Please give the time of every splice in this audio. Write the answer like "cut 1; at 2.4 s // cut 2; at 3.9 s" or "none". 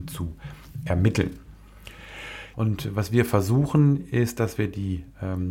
cut 1; at 2.5 s